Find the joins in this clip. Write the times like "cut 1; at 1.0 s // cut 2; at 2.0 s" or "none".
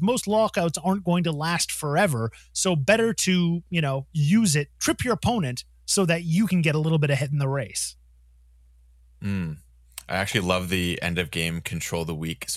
none